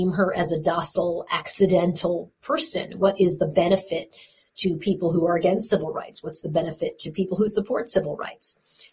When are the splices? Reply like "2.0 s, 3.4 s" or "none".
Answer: none